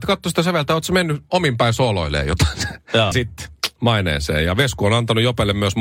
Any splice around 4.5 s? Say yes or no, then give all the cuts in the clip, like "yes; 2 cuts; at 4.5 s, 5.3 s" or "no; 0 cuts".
no; 1 cut; at 3.1 s